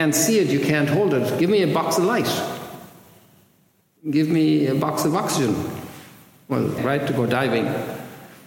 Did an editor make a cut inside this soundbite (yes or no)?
yes